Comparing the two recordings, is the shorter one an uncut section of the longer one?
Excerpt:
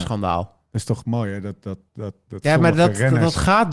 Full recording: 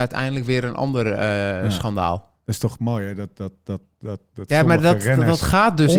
no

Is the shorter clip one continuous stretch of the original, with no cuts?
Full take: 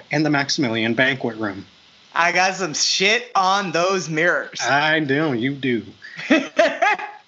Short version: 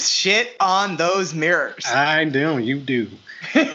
yes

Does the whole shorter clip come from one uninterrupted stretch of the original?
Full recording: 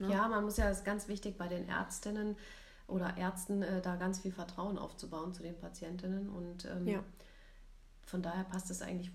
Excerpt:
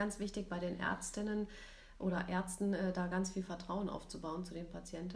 yes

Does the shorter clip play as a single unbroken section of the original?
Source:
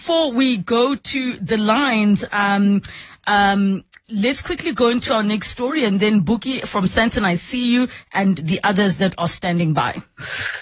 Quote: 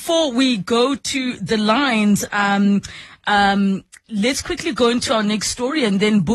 yes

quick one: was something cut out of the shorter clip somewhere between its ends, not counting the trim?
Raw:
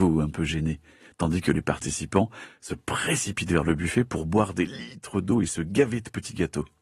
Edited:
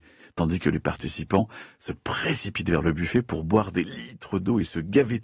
no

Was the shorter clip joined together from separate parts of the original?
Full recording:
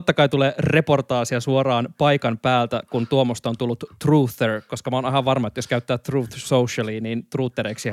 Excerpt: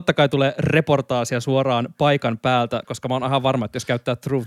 yes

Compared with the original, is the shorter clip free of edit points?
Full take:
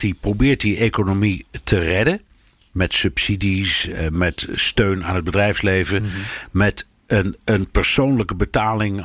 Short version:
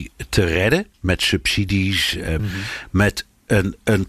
no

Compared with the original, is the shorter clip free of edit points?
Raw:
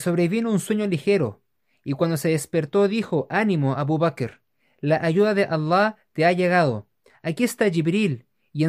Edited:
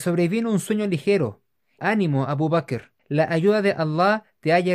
no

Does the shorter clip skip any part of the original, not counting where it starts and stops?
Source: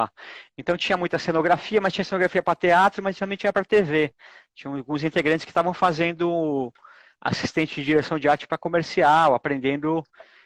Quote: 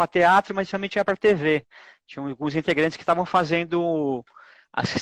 no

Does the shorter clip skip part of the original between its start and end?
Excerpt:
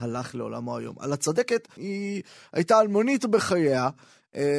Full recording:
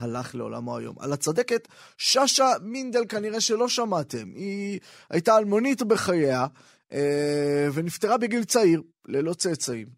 yes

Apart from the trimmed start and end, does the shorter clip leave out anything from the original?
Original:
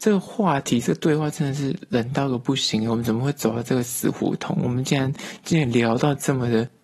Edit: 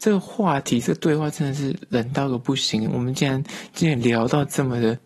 yes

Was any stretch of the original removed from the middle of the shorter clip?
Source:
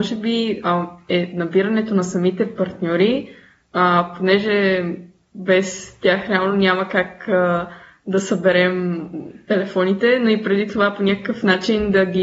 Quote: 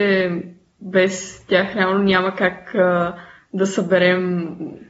no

